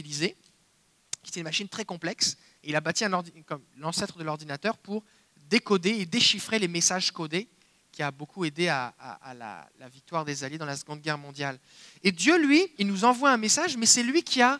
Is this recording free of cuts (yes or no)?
no